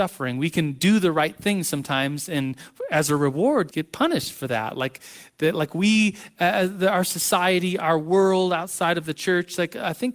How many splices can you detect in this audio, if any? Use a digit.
1